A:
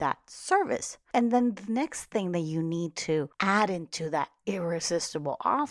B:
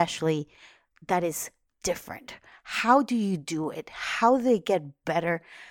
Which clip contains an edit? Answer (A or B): A